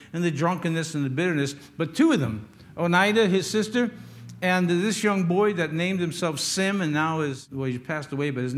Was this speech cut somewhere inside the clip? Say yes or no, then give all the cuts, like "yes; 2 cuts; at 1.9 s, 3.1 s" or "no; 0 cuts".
no; 0 cuts